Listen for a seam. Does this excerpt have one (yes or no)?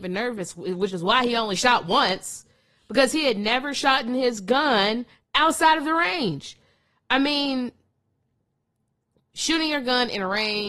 no